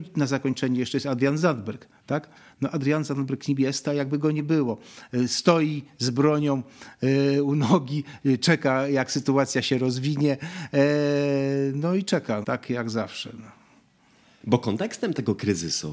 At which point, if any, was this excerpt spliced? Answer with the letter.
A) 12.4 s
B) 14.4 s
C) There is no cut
A